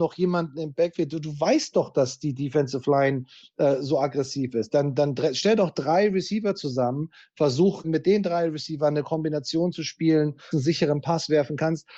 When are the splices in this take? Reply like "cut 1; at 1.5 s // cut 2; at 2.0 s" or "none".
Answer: cut 1; at 7.8 s // cut 2; at 10.5 s